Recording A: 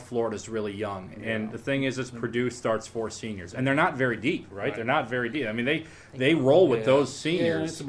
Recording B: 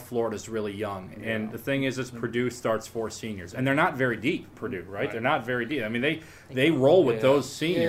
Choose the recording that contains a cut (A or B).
A